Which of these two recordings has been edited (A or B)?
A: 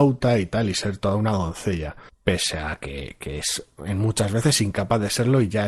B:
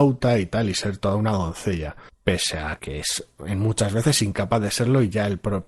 B